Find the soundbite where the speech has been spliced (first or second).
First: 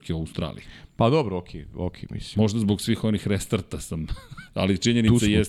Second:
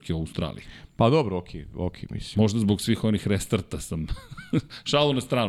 first